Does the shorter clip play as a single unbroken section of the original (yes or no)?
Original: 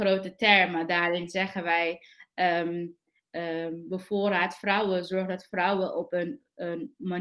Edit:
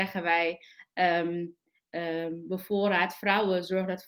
yes